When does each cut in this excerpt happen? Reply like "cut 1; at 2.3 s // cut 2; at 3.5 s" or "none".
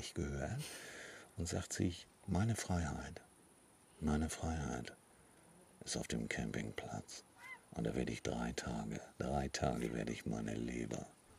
cut 1; at 7.6 s // cut 2; at 9.1 s